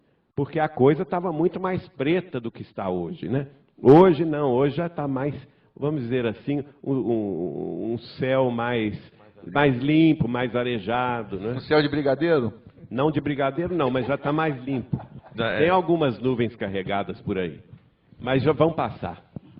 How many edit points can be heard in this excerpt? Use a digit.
0